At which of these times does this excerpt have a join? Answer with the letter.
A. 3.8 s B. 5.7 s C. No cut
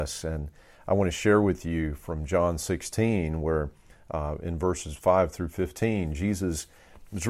C